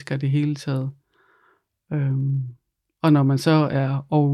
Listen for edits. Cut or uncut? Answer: uncut